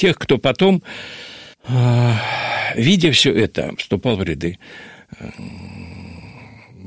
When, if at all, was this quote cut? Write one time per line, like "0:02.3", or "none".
0:01.5
0:03.8